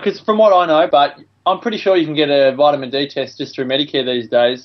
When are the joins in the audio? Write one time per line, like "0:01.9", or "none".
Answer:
0:00.9

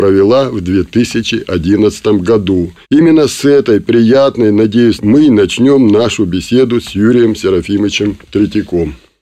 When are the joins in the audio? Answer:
0:02.8
0:05.0

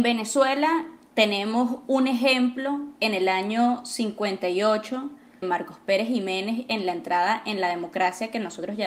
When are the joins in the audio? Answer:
0:05.4

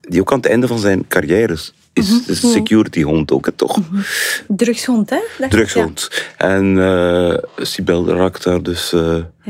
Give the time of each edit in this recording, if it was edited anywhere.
none

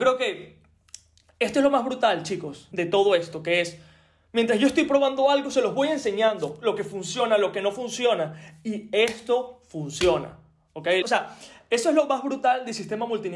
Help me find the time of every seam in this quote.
0:02.7
0:11.0

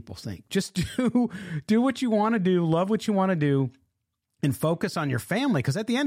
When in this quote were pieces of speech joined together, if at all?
none

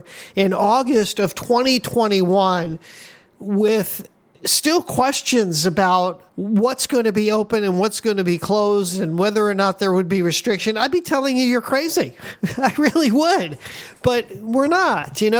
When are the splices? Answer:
0:06.3

